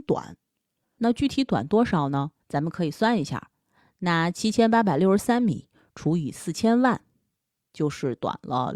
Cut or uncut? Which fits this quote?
cut